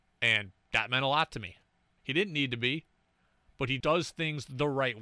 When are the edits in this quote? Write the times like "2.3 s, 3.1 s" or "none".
2.0 s, 3.8 s